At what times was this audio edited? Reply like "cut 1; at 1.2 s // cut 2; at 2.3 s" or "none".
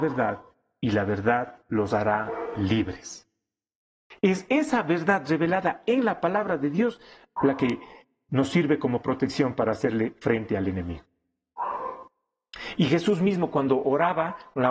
none